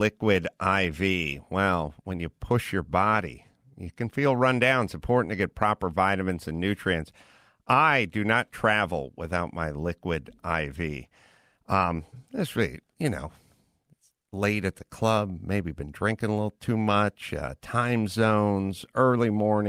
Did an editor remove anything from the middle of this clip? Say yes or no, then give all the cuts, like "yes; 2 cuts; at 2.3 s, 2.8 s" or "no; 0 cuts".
no; 0 cuts